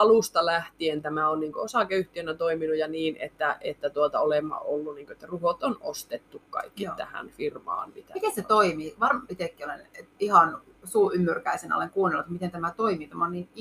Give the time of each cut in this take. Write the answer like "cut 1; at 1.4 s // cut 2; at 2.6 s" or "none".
cut 1; at 9.3 s